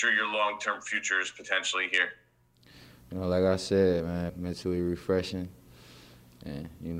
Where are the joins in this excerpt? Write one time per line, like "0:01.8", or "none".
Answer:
0:04.3